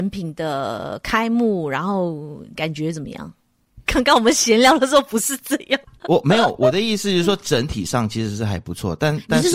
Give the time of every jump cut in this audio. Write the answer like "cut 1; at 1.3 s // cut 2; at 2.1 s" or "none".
cut 1; at 3.9 s